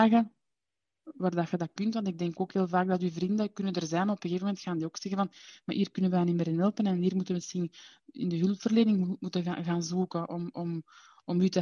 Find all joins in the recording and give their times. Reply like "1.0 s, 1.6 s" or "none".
none

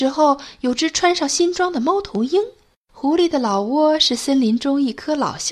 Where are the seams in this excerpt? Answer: 2.7 s

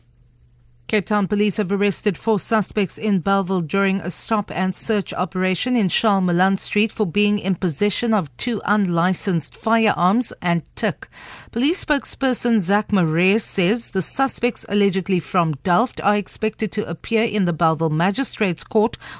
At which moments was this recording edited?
10.4 s

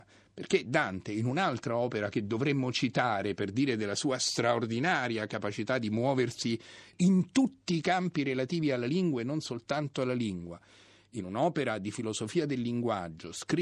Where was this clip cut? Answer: none

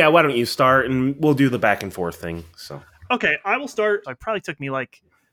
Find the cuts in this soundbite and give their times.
4.0 s

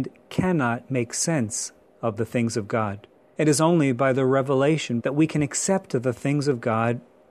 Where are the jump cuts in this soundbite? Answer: 3.4 s, 5.0 s

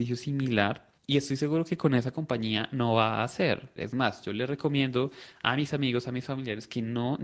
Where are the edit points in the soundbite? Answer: 1.0 s, 3.8 s

